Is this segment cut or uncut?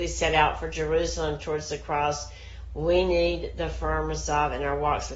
uncut